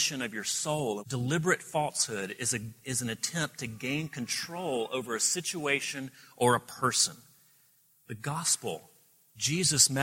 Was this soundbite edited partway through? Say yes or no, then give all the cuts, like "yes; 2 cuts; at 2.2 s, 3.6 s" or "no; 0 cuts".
yes; 1 cut; at 1.0 s